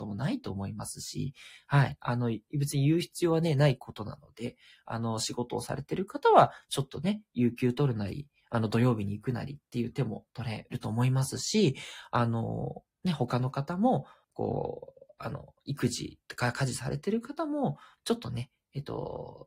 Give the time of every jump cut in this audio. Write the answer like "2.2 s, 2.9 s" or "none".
14.2 s, 18.0 s